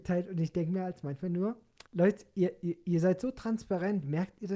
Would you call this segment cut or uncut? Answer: cut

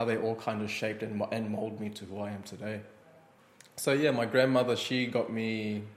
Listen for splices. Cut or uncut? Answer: uncut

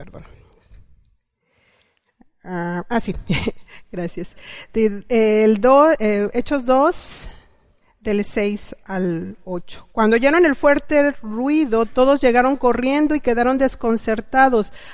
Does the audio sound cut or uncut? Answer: uncut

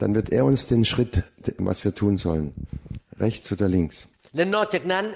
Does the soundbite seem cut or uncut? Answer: cut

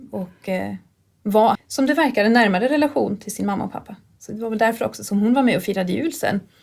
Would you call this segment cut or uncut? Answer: cut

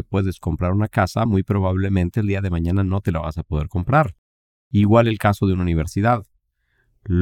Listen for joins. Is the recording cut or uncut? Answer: uncut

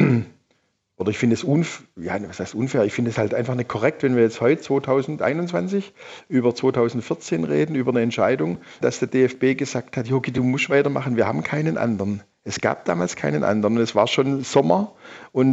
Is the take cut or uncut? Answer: cut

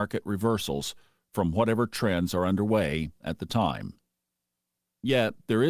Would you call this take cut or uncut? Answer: uncut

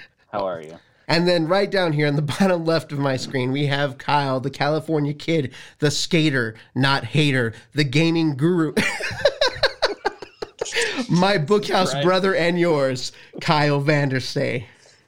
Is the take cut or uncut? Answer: cut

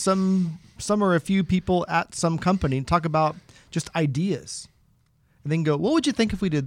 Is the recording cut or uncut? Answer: uncut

